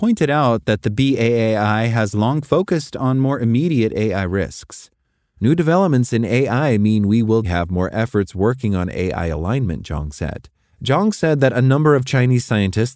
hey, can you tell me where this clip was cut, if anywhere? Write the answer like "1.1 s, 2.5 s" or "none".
7.4 s, 10.7 s